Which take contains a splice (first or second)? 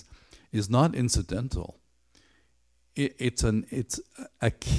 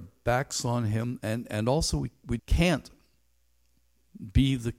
second